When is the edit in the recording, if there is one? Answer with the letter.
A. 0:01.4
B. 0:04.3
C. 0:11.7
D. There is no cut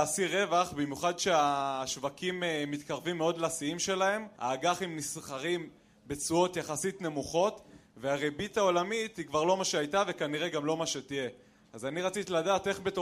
D